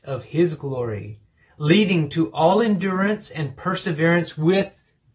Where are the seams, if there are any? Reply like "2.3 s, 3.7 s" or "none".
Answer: none